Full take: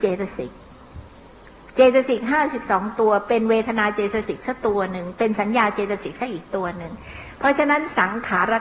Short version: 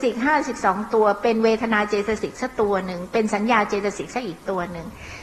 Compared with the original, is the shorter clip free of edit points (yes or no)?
yes